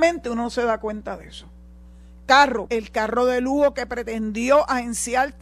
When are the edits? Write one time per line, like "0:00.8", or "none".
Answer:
0:02.7